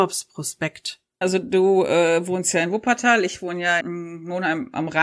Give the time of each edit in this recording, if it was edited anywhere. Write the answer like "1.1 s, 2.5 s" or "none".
1.2 s, 3.8 s

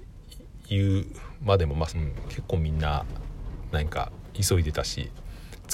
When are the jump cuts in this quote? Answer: 1.9 s

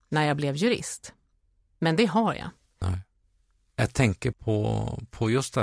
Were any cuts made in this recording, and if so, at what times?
2.8 s, 4.3 s

